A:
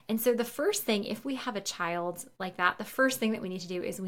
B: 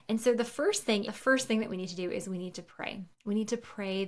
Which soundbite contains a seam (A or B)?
B